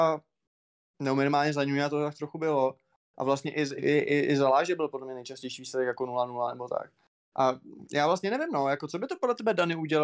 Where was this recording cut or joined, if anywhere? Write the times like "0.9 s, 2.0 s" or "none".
3.8 s